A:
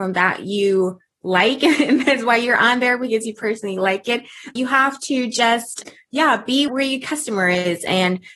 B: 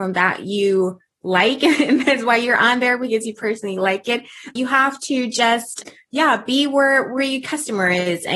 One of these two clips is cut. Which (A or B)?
A